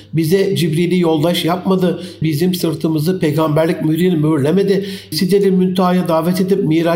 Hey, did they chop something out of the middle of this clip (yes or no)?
yes